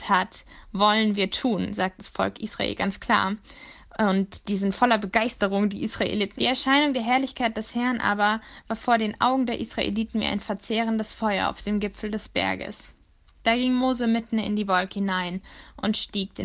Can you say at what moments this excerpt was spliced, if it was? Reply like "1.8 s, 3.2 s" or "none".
6.4 s